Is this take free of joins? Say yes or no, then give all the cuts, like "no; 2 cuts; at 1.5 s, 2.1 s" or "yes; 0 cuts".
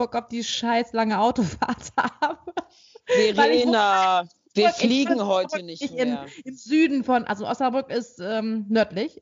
yes; 0 cuts